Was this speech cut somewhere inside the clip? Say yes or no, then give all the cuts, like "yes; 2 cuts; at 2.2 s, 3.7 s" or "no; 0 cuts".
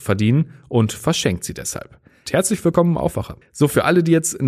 yes; 2 cuts; at 2.3 s, 3.4 s